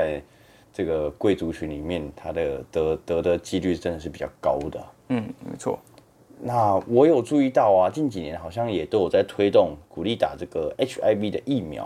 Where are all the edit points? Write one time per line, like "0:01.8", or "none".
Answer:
none

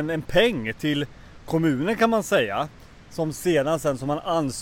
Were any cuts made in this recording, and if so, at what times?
none

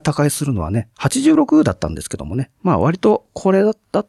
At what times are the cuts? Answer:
0:00.9

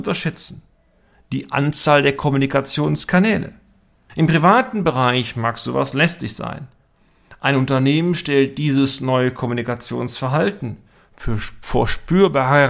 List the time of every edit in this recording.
0:04.1

